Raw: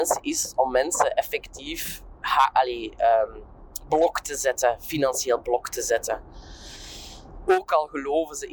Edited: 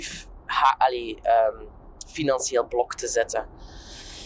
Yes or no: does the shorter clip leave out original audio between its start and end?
yes